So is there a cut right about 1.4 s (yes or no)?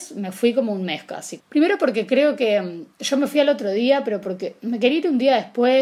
yes